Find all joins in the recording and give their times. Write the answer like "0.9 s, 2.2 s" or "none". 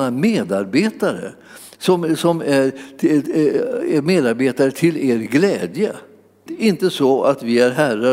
6.5 s